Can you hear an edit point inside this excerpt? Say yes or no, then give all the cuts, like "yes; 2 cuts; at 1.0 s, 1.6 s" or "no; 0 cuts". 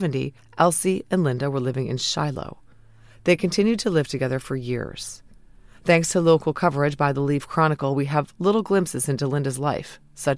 no; 0 cuts